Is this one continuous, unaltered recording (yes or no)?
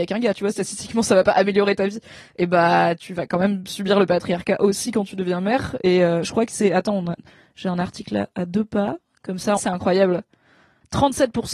no